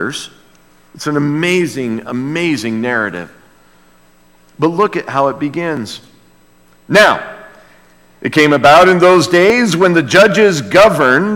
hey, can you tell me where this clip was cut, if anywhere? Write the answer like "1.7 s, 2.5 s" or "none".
none

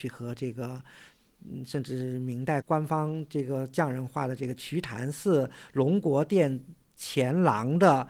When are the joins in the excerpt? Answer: 2.6 s

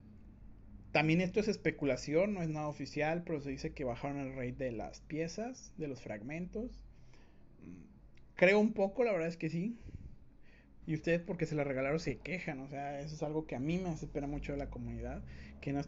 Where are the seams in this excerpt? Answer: 10.8 s

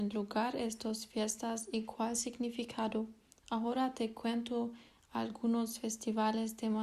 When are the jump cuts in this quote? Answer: none

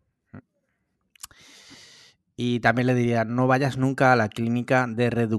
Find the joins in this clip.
none

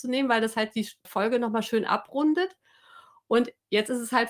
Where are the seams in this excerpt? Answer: 1.1 s

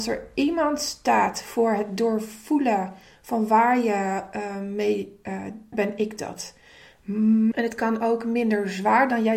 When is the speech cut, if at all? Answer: 5.7 s, 7.5 s

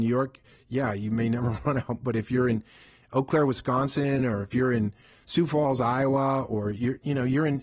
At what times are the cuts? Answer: none

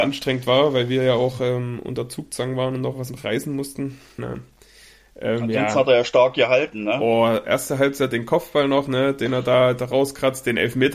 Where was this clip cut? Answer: 4.2 s

